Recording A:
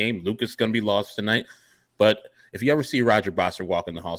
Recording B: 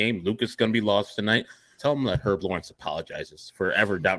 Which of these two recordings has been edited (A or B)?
B